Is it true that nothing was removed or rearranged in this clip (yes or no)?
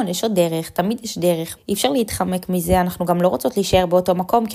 no